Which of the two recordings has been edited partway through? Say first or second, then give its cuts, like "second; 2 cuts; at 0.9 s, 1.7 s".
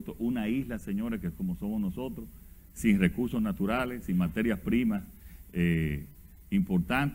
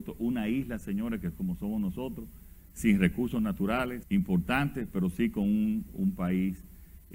second; 2 cuts; at 4.0 s, 5.9 s